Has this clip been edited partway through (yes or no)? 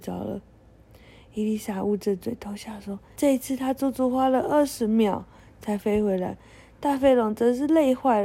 yes